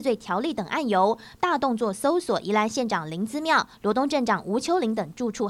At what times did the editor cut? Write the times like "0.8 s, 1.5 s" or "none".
1.4 s, 3.7 s

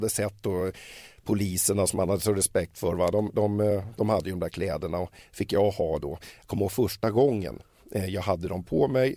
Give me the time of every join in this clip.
none

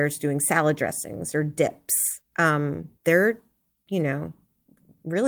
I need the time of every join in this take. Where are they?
3.0 s

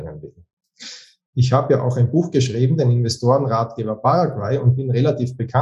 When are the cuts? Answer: 1.3 s

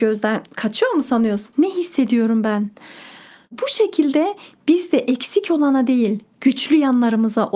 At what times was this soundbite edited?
1.5 s

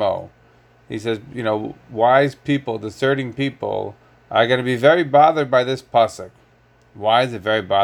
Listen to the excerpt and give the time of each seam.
none

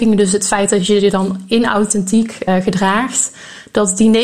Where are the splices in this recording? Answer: 2.5 s

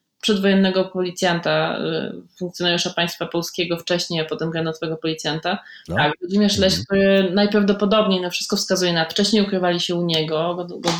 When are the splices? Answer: 5.9 s, 9.1 s

